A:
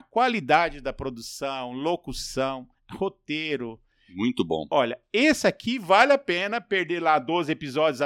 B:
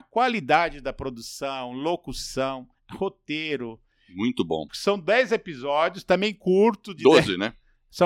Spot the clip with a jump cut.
B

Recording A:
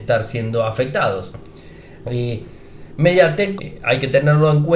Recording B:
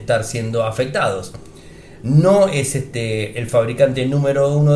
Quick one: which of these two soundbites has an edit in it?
A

